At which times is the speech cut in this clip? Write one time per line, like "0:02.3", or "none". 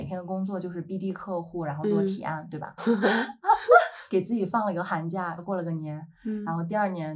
0:02.8
0:05.4

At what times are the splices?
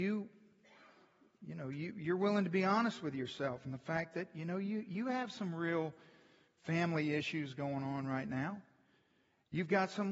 none

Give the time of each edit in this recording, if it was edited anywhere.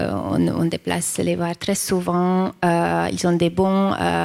none

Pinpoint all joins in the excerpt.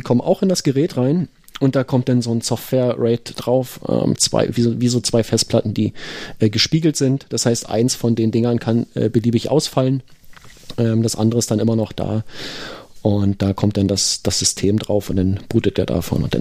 0:04.2

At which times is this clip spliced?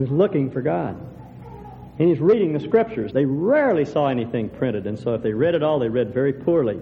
0:03.1

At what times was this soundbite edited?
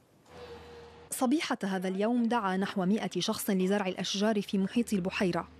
0:01.1

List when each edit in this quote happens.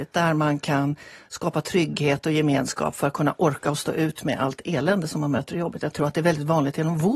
none

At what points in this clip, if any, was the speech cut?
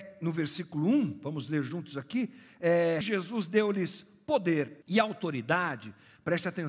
0:03.0
0:04.8

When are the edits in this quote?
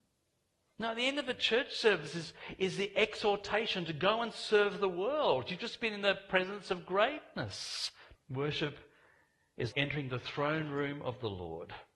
0:08.1
0:09.7

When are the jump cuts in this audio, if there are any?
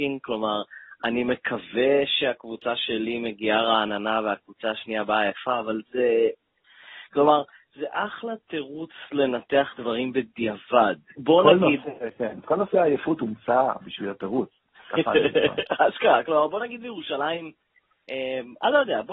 0:11.2

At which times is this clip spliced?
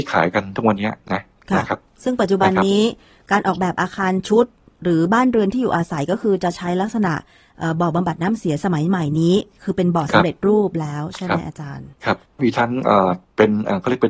none

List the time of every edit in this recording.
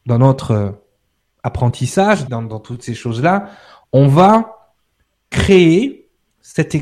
0:02.3

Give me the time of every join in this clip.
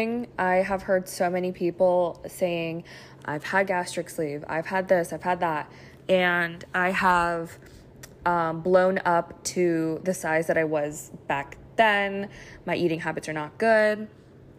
none

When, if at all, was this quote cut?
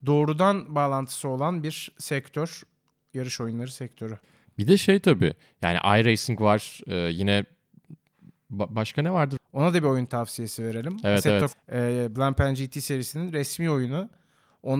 0:09.4
0:11.5

